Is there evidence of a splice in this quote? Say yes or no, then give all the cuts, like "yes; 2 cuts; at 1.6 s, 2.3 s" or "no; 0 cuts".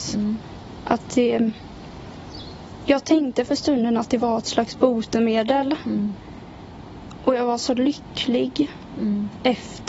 no; 0 cuts